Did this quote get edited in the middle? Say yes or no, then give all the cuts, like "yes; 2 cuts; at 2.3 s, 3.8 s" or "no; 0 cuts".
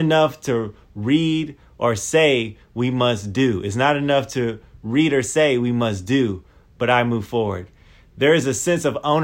no; 0 cuts